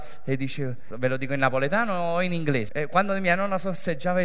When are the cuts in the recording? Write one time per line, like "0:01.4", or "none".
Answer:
0:00.9
0:02.7